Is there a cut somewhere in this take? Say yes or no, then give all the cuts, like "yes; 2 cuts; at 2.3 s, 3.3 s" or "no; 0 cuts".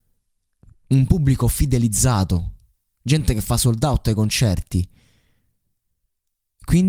no; 0 cuts